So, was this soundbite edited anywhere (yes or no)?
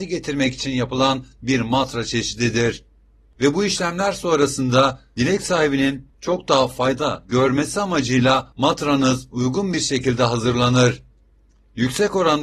yes